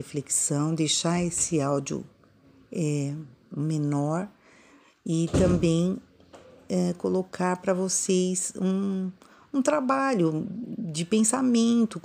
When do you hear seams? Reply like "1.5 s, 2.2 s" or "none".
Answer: none